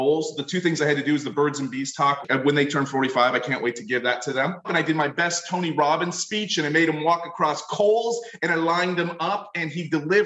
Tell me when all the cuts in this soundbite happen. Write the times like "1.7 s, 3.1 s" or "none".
4.6 s